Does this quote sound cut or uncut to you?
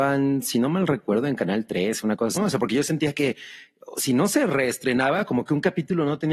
cut